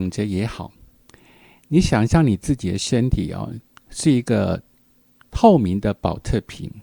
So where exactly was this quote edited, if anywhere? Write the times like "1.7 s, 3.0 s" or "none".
none